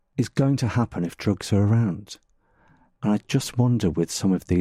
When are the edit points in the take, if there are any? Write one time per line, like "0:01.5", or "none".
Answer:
none